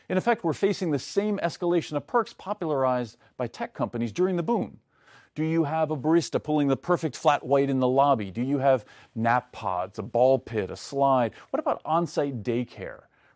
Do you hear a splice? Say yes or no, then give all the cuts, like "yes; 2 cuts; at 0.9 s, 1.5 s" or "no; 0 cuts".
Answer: no; 0 cuts